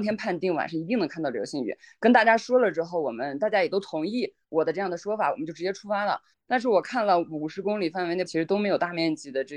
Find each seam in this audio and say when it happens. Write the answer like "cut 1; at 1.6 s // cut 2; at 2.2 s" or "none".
cut 1; at 6.3 s // cut 2; at 8.3 s